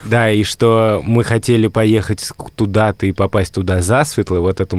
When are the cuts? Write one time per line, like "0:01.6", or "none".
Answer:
none